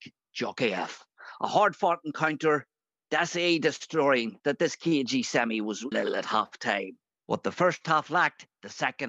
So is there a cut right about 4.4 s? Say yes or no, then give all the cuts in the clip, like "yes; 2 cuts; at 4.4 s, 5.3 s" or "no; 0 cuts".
yes; 3 cuts; at 3.1 s, 4.4 s, 5.9 s